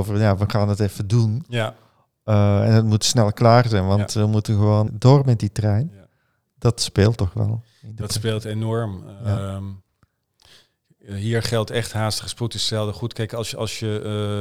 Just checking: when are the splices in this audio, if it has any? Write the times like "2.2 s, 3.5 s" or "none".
4.9 s